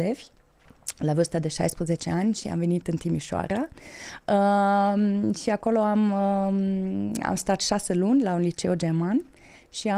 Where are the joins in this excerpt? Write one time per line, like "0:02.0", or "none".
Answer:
none